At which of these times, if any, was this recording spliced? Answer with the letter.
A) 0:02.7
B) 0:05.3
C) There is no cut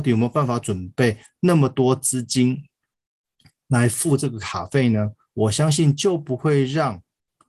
B